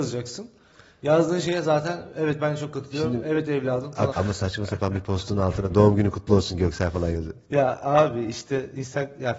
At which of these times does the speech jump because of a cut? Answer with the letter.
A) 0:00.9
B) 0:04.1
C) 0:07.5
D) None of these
B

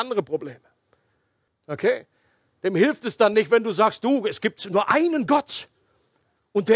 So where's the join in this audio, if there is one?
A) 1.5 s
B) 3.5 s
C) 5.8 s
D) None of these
A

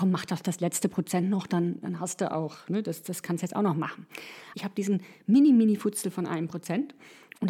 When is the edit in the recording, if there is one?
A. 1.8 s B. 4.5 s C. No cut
B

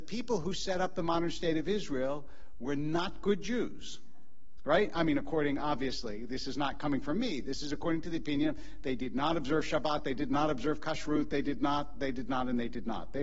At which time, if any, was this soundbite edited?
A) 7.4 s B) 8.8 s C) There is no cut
C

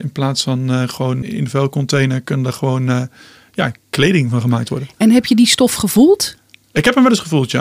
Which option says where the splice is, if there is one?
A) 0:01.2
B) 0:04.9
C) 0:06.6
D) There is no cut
A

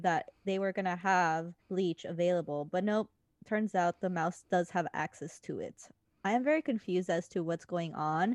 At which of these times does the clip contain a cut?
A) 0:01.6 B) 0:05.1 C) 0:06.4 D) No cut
A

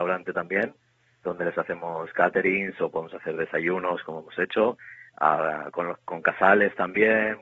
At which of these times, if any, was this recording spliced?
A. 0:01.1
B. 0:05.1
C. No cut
C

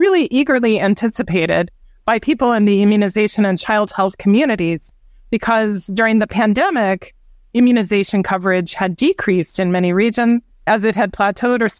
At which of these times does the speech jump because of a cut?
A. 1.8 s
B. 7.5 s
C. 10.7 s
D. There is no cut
C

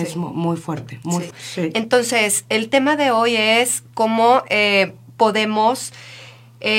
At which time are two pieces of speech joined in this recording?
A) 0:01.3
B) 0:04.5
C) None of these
A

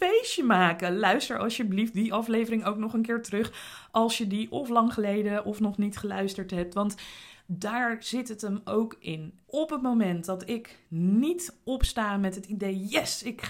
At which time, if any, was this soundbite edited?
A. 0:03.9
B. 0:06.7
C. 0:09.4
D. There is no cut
C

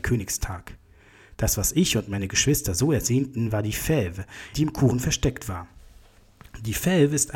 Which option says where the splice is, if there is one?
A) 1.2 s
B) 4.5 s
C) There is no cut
B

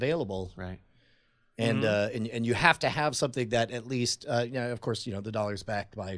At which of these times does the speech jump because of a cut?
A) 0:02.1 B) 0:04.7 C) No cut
C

